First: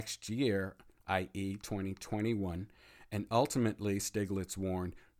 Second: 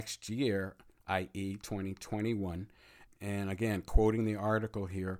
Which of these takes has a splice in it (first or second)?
second